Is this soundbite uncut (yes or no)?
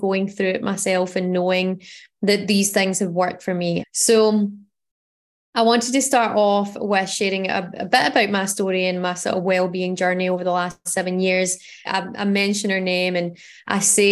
no